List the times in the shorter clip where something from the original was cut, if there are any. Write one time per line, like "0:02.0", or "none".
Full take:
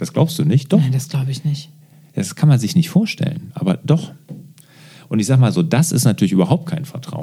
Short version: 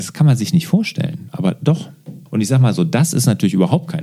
0:02.3